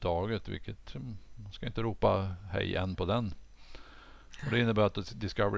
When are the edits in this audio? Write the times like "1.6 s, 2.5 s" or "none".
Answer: 1.3 s